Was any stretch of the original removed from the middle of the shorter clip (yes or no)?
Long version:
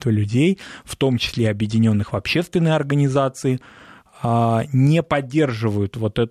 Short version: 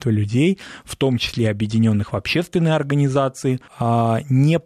yes